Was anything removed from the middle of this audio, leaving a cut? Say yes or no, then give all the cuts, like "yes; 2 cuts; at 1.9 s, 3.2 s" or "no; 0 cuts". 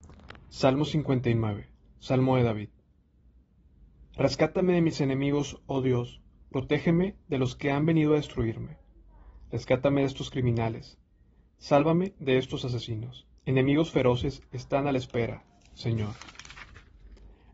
yes; 1 cut; at 13.4 s